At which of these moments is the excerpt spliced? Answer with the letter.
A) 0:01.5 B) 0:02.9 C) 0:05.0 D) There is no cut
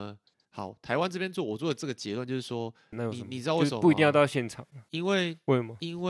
B